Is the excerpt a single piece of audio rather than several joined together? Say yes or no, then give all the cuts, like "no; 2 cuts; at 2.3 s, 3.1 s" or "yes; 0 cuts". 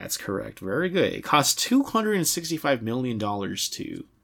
yes; 0 cuts